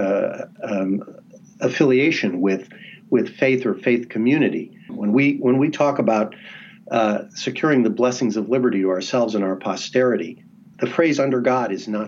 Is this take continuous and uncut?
no; 2 cuts; at 4.9 s, 10.7 s

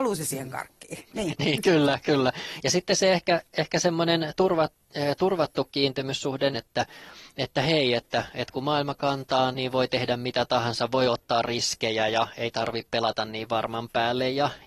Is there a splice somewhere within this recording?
yes; 3 cuts; at 2.6 s, 6.5 s, 9.5 s

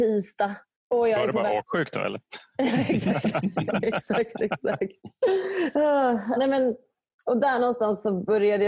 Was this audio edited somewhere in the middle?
yes; 1 cut; at 6.4 s

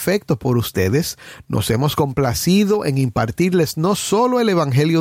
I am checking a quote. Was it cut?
no; 0 cuts

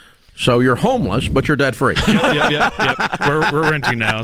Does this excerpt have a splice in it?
no; 0 cuts

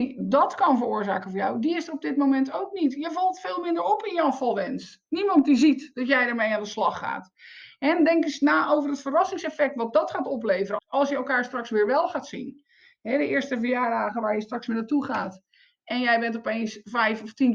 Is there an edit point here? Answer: yes; 1 cut; at 10.8 s

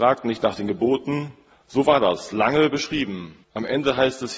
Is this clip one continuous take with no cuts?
no; 2 cuts; at 1.6 s, 3.4 s

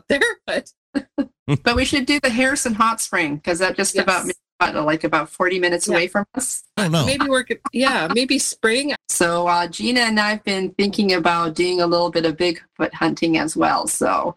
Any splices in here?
yes; 2 cuts; at 6.8 s, 9.0 s

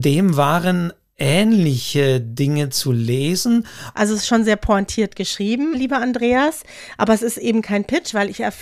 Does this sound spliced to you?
yes; 1 cut; at 3.9 s

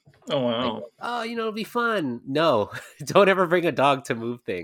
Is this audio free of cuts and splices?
no; 1 cut; at 1.0 s

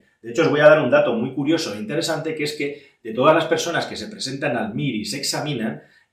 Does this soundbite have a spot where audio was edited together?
no; 0 cuts

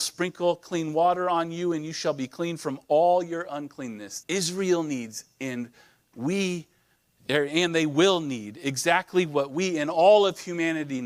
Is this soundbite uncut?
no; 1 cut; at 4.2 s

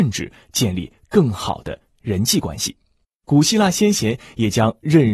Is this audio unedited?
no; 1 cut; at 3.0 s

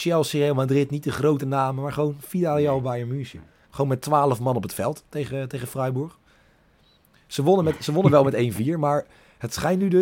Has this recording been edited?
yes; 1 cut; at 3.6 s

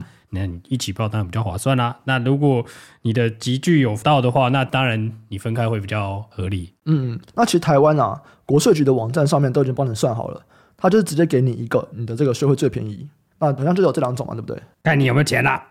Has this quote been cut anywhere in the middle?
yes; 3 cuts; at 7.3 s, 11.9 s, 13.3 s

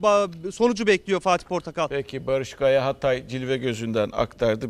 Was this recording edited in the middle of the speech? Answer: no; 0 cuts

